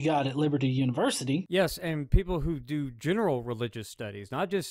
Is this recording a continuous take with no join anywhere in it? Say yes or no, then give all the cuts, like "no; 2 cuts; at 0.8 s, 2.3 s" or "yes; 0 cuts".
yes; 0 cuts